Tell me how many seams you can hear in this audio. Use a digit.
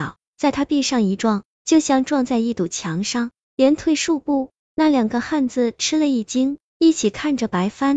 0